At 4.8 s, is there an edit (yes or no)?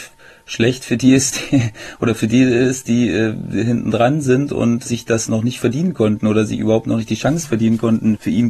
yes